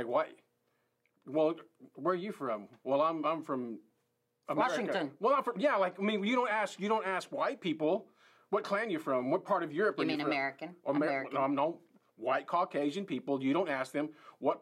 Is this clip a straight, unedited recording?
yes; 0 cuts

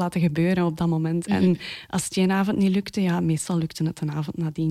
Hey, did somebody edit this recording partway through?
no; 0 cuts

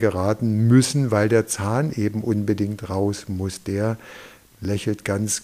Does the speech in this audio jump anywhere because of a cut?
no; 0 cuts

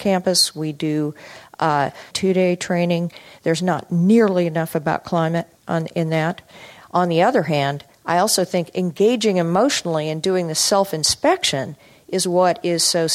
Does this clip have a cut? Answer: yes; 3 cuts; at 2.1 s, 5.6 s, 6.8 s

